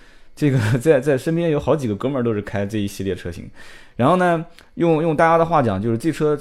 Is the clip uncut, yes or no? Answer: yes